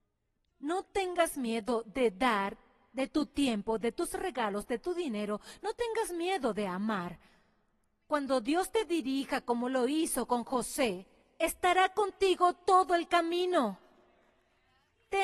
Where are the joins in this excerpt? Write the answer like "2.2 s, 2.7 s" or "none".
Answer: none

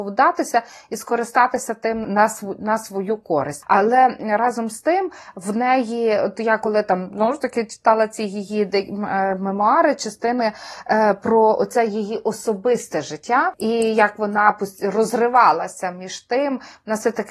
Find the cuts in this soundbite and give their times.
2.0 s

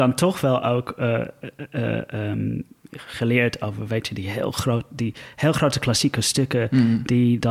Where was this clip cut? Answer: none

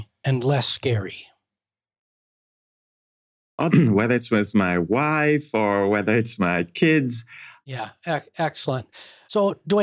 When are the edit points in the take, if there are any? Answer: 3.7 s, 7.6 s

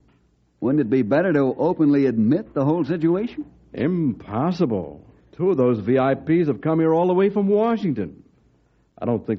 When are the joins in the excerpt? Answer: 3.7 s

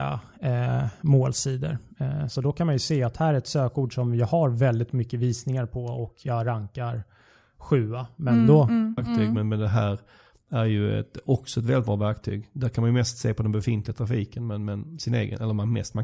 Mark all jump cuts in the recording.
2.3 s, 9.0 s

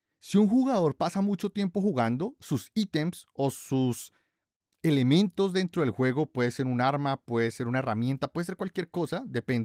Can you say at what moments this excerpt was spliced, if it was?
none

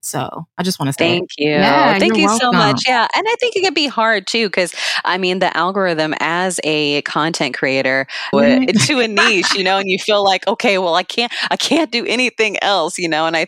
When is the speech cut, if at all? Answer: 8.3 s

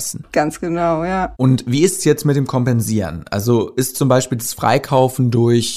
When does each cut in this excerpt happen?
1.3 s

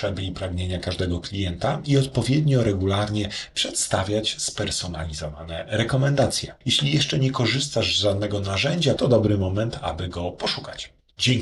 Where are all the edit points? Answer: 6.6 s, 9.0 s

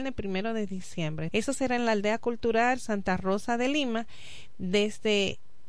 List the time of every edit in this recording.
1.3 s

